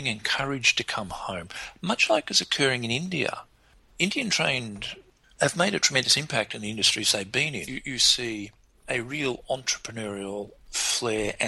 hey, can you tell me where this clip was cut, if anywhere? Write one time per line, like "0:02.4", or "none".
0:05.4
0:07.7